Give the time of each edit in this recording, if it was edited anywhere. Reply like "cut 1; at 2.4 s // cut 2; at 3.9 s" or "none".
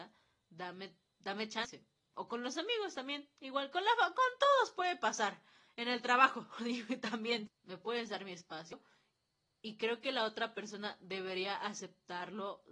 cut 1; at 7.5 s